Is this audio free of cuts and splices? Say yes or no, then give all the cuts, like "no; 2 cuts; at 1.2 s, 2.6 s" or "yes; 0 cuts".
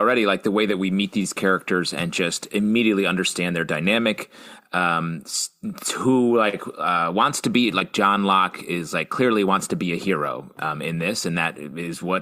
yes; 0 cuts